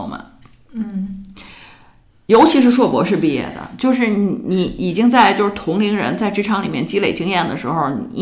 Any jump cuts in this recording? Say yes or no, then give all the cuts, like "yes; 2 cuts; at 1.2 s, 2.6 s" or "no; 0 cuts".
no; 0 cuts